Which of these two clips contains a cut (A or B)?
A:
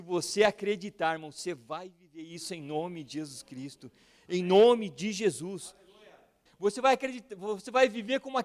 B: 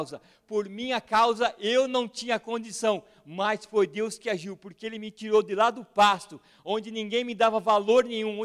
A